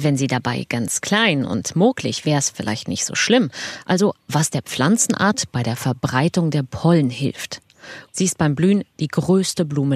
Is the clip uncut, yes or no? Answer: no